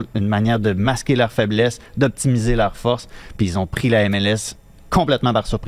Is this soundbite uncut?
yes; 0 cuts

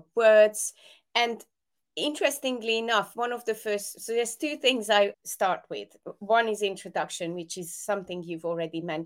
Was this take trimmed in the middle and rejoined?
yes; 1 cut; at 5.1 s

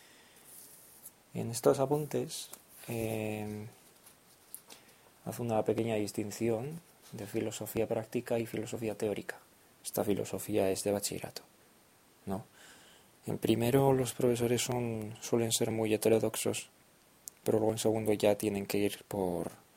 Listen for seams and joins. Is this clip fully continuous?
yes; 0 cuts

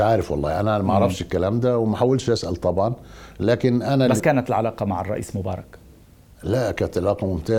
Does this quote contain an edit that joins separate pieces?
yes; 1 cut; at 4.2 s

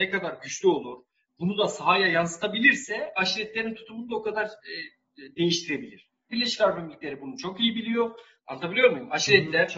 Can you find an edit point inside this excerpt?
yes; 2 cuts; at 6.3 s, 8.4 s

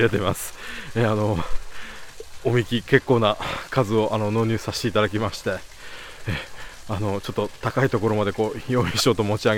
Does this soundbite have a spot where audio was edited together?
no; 0 cuts

